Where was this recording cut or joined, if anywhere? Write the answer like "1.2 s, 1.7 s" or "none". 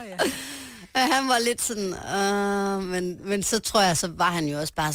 none